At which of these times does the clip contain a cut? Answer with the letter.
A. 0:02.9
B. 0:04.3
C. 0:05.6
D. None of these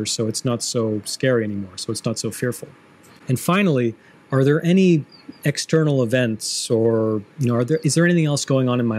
D